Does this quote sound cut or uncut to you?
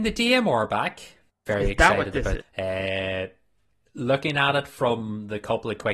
cut